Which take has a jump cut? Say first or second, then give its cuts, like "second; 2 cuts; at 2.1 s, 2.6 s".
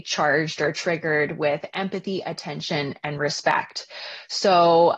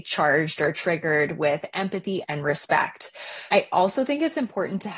second; 2 cuts; at 2.2 s, 3.5 s